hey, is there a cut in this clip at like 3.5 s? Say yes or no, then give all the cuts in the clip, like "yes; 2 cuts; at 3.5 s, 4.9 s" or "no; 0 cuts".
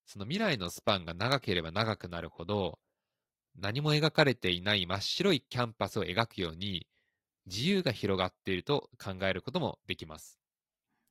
no; 0 cuts